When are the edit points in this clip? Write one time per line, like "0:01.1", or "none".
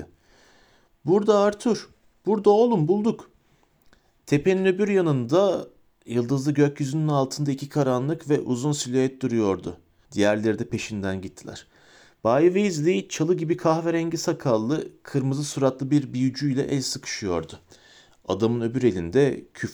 0:10.1